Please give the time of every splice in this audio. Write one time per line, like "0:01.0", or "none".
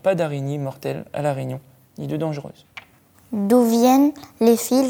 none